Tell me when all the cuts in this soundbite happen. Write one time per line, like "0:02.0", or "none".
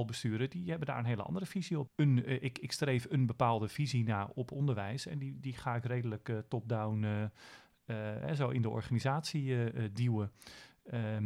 0:01.9